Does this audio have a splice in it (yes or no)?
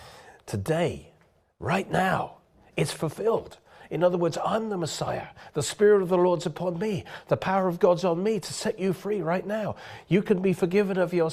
no